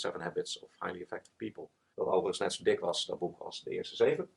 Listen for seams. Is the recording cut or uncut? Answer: cut